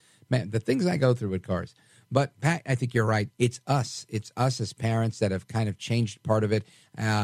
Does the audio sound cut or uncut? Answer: cut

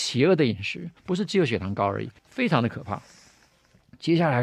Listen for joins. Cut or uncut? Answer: cut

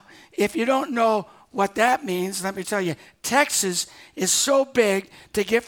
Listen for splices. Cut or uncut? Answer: cut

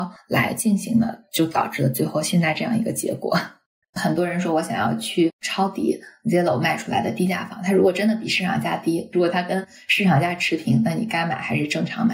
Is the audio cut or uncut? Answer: cut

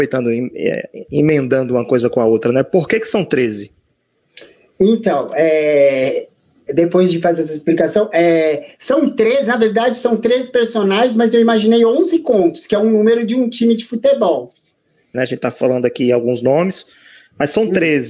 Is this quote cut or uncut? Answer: cut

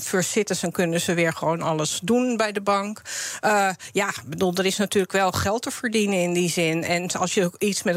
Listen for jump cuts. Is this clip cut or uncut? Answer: uncut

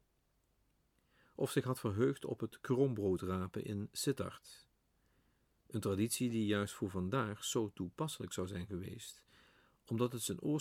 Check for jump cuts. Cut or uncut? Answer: uncut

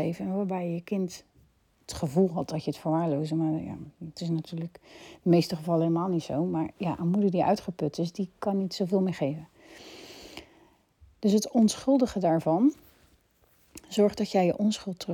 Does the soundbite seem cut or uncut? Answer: uncut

